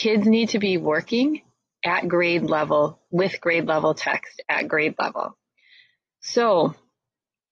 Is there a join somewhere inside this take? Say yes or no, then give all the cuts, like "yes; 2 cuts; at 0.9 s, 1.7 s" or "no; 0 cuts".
no; 0 cuts